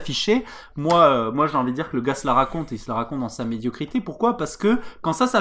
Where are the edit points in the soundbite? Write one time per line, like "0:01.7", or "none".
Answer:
none